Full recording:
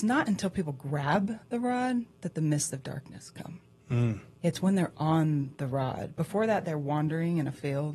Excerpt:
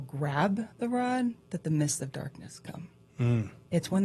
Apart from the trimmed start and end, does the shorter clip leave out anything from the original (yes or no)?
no